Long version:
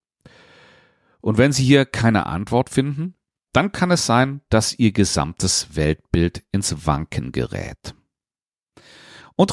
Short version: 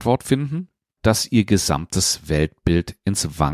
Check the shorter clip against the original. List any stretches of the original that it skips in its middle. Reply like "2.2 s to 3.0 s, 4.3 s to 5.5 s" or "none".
3.4 s to 4.4 s